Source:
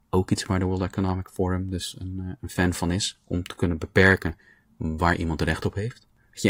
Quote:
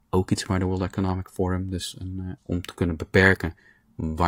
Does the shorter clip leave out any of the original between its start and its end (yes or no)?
yes